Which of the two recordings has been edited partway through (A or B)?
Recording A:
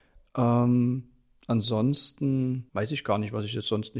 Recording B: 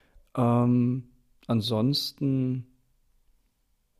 A